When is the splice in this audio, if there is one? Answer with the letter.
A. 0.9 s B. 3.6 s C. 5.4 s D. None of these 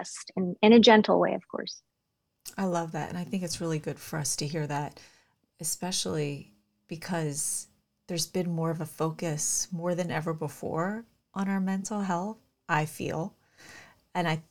C